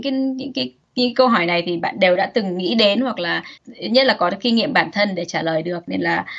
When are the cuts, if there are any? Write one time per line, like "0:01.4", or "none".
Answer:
0:03.6